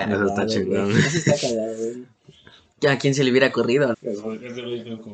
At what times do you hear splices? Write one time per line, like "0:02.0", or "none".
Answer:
0:03.9